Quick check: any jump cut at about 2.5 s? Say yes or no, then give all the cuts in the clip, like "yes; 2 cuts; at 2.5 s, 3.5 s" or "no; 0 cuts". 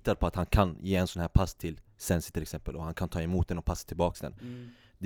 no; 0 cuts